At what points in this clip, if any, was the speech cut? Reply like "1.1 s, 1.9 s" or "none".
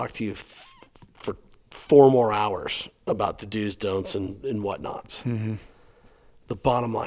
none